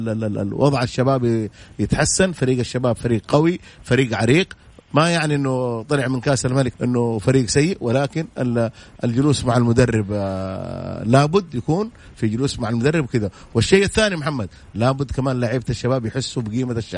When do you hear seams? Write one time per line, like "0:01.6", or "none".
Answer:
0:06.7